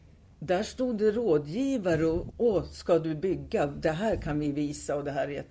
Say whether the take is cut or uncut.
cut